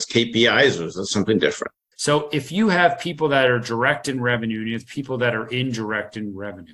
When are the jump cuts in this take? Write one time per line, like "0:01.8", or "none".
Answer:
0:01.9